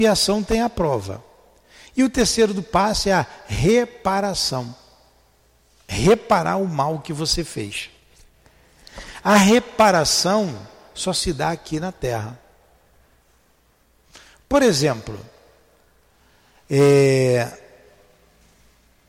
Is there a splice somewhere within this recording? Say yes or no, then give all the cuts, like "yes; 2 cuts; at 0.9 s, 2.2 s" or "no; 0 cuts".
no; 0 cuts